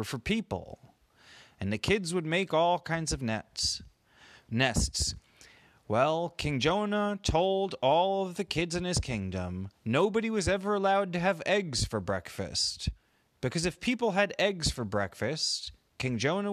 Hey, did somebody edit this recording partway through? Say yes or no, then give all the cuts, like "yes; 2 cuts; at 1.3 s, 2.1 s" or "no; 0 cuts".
no; 0 cuts